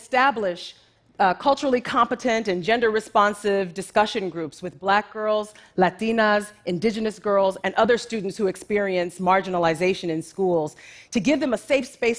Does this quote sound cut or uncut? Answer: uncut